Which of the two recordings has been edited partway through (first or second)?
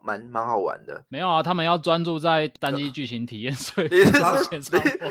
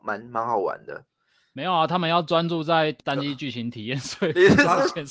first